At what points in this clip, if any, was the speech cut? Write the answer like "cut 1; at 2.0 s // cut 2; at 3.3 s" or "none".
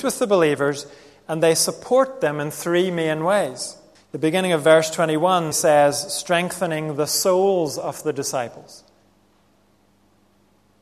cut 1; at 4.0 s // cut 2; at 5.5 s